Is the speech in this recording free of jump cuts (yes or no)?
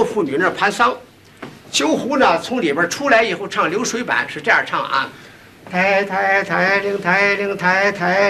yes